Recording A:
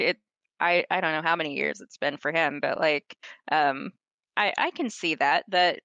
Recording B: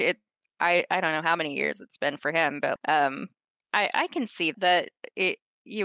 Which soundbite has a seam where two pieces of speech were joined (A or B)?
B